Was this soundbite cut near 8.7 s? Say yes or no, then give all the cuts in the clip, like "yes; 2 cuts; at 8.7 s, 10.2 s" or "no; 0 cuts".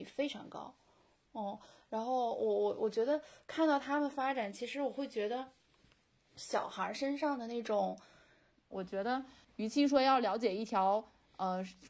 yes; 1 cut; at 8.7 s